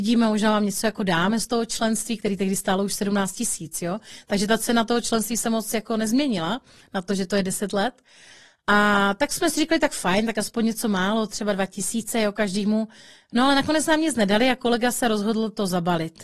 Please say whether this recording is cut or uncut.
uncut